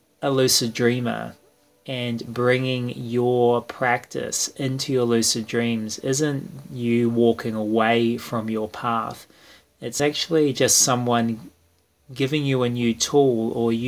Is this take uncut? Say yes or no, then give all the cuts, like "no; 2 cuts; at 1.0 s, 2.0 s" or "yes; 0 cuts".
yes; 0 cuts